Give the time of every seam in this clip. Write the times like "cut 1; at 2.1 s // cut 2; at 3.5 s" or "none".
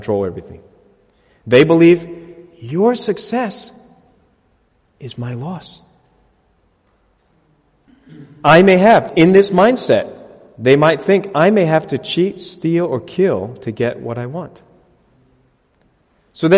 cut 1; at 9.1 s